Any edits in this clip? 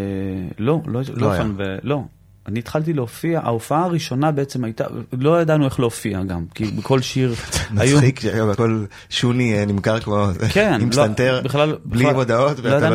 no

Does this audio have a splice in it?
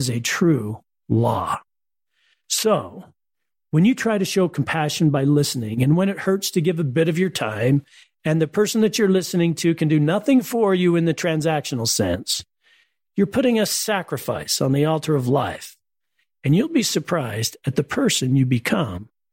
no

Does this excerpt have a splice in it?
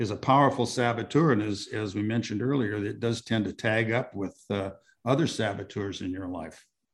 no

